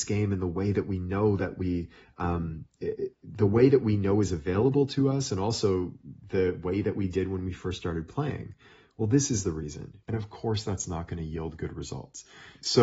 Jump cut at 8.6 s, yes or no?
no